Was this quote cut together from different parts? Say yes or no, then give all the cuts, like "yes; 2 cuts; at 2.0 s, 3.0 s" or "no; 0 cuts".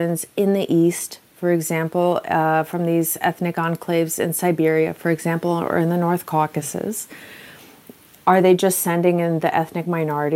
no; 0 cuts